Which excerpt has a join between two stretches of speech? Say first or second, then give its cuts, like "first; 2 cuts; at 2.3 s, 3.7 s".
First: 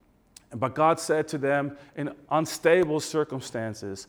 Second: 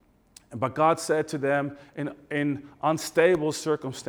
first; 1 cut; at 2.2 s